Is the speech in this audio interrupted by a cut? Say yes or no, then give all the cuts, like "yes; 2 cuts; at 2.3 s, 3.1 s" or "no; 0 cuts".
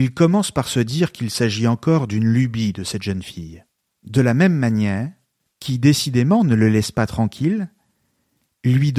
yes; 2 cuts; at 3.8 s, 5.5 s